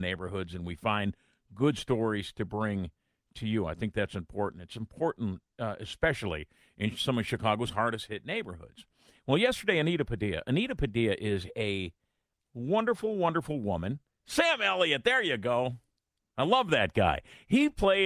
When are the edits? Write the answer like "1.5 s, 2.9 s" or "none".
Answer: 14.1 s